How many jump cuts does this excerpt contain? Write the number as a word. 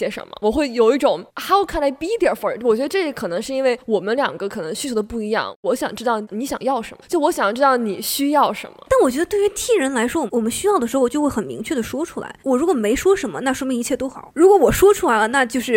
zero